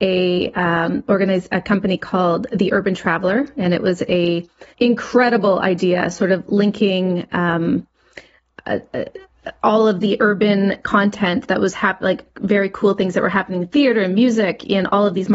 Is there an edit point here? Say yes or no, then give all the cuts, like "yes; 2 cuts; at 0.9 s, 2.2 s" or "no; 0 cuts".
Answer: yes; 1 cut; at 4.7 s